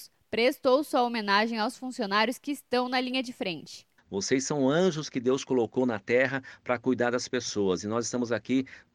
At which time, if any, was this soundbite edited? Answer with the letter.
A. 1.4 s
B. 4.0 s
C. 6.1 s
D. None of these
B